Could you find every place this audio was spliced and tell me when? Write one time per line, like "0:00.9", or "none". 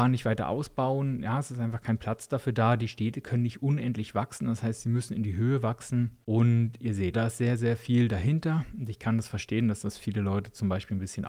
0:07.1